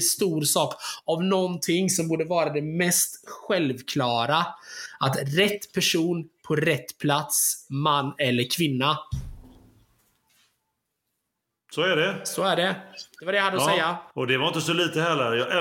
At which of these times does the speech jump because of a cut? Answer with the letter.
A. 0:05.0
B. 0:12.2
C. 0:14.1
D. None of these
C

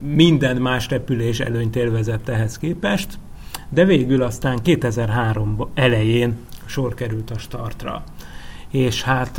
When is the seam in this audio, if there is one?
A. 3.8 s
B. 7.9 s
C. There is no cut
C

